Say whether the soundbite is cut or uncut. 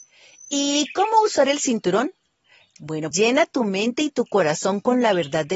cut